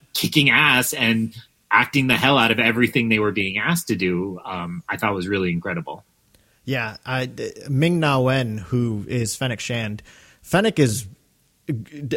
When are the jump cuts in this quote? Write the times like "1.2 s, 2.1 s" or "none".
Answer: none

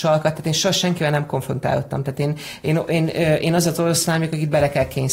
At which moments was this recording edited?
none

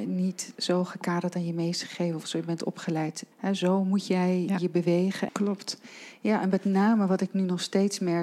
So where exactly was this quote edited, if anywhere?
3.3 s, 5.3 s

